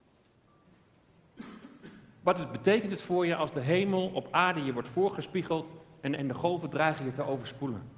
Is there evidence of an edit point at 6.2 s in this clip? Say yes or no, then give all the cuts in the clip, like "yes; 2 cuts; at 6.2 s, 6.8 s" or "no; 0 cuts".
yes; 1 cut; at 6.2 s